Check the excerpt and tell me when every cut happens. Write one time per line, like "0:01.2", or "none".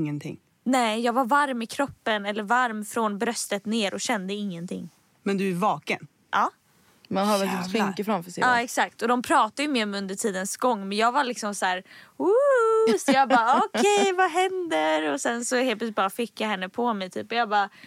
none